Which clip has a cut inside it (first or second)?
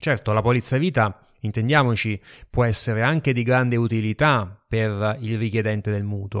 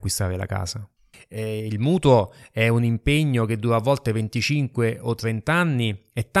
second